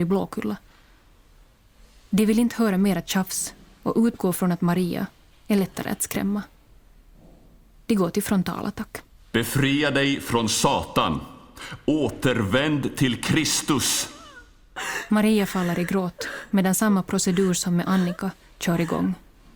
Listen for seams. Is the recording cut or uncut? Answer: cut